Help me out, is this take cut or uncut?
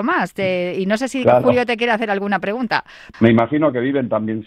cut